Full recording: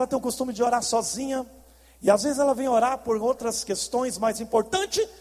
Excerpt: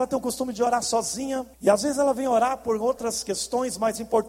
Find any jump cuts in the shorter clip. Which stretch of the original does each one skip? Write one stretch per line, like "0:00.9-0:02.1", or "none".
0:01.5-0:01.9